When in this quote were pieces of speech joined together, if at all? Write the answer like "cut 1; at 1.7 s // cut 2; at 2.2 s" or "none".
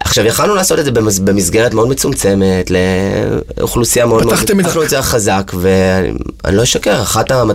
cut 1; at 4.6 s